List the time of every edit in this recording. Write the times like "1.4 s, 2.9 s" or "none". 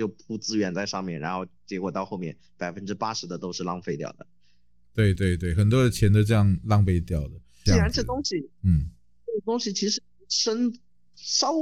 5.2 s, 7.7 s